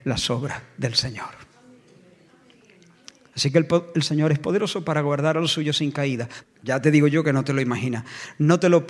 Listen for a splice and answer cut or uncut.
cut